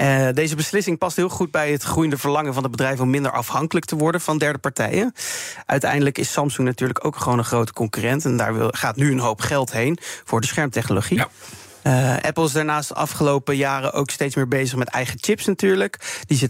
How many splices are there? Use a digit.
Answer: 0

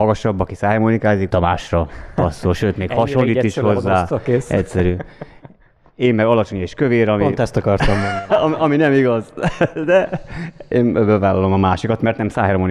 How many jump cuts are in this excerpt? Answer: 1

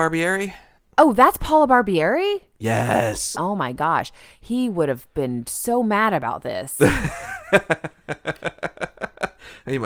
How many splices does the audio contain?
1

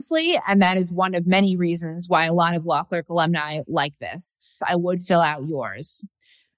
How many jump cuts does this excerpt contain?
1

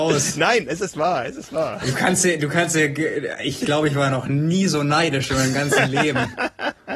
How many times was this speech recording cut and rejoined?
0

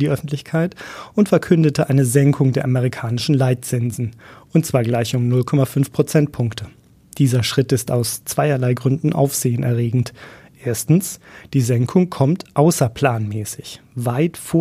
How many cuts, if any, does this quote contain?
0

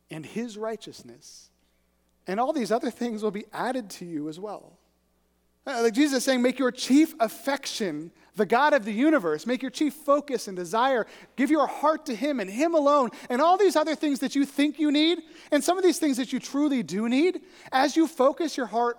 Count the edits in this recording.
0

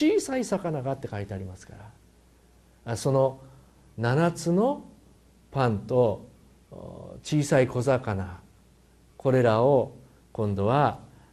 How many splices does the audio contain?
0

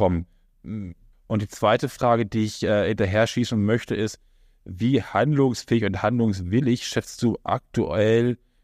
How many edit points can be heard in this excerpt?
1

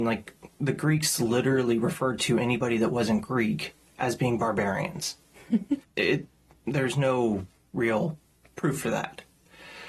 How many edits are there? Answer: 1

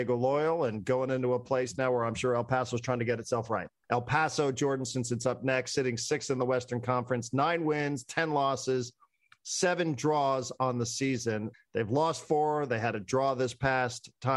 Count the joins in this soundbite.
2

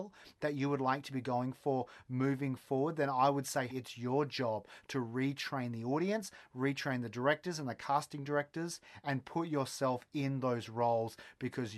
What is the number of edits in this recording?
1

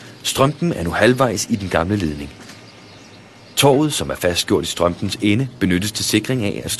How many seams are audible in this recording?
0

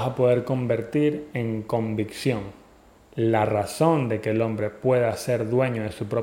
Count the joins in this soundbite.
1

